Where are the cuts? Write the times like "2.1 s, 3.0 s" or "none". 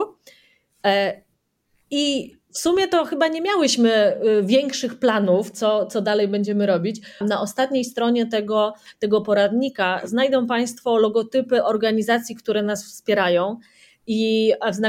7.2 s